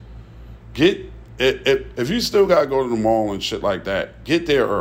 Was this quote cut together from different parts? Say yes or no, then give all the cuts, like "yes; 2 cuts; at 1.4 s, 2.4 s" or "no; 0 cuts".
yes; 1 cut; at 2.0 s